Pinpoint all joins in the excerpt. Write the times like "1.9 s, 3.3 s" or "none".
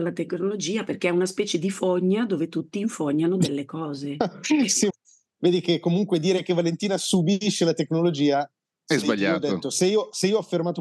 4.9 s